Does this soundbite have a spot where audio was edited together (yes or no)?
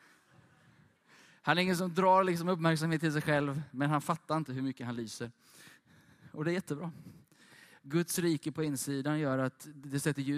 no